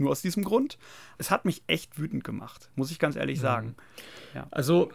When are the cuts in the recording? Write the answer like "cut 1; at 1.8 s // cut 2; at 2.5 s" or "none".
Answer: cut 1; at 1.2 s